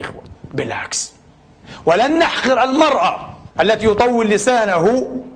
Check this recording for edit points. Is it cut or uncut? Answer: cut